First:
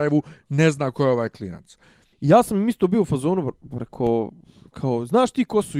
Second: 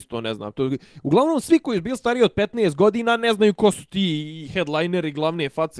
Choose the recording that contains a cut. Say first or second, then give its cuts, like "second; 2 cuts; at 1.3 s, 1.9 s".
first; 1 cut; at 2.1 s